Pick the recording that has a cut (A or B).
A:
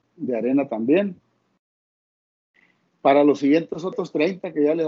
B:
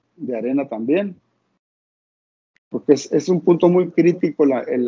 B